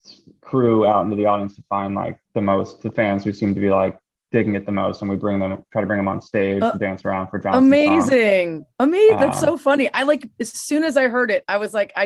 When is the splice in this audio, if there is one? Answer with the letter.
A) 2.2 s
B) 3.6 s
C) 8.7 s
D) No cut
A